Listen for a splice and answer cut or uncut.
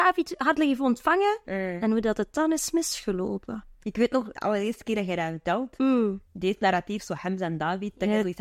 uncut